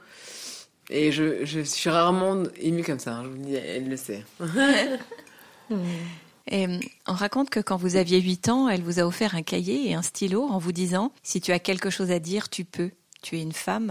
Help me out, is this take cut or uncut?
cut